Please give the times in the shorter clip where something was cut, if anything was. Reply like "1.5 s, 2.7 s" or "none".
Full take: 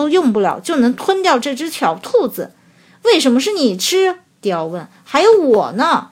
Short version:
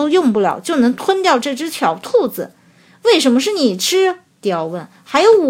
none